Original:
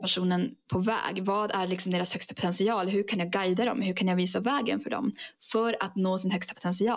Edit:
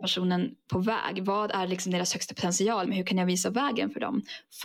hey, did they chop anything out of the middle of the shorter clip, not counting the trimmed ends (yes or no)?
yes